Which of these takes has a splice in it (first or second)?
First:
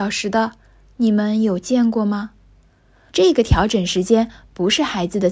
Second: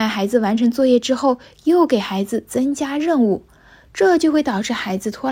first